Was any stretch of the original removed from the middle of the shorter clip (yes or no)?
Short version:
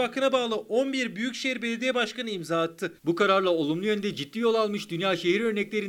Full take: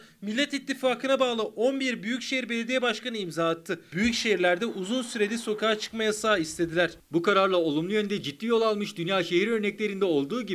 yes